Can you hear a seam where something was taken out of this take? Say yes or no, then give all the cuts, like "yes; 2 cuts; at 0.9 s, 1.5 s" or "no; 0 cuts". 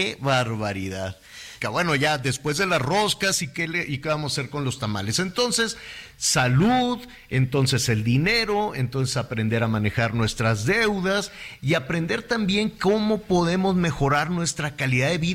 yes; 1 cut; at 1.6 s